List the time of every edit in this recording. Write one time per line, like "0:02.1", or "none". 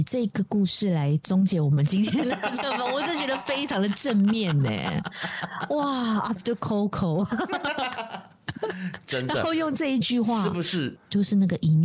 0:10.9